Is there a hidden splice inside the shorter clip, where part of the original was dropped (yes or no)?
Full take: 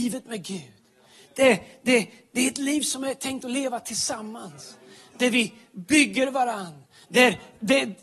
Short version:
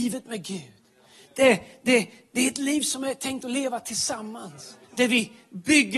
yes